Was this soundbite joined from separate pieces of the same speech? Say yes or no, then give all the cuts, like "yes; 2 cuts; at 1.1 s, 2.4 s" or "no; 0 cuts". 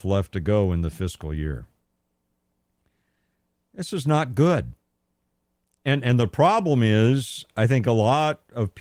no; 0 cuts